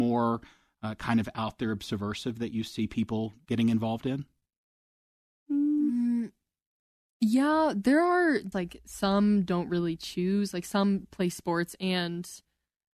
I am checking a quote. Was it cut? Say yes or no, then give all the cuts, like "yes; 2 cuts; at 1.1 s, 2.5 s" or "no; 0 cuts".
yes; 1 cut; at 8.5 s